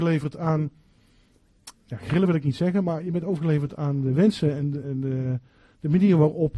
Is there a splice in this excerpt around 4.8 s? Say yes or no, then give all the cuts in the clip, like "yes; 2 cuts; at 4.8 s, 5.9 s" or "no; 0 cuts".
yes; 1 cut; at 4.8 s